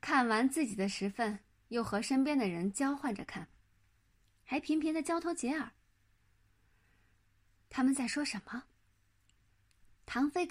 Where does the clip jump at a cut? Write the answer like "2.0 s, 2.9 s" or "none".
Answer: none